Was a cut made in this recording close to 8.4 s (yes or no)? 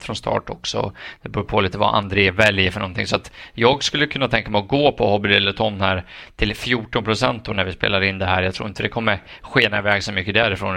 no